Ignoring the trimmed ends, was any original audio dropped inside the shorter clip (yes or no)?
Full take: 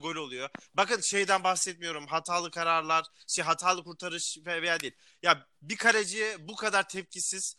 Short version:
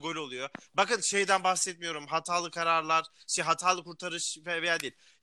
no